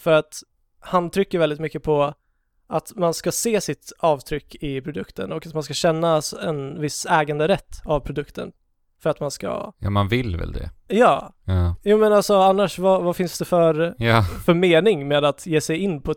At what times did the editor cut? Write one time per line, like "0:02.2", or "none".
none